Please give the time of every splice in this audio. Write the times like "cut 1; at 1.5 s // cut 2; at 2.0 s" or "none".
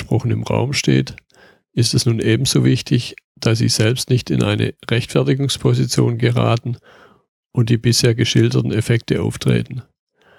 none